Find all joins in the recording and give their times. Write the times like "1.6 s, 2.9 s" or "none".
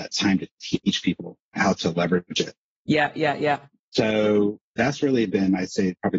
none